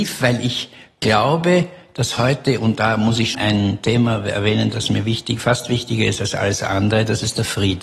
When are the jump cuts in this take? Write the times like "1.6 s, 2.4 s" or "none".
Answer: 3.3 s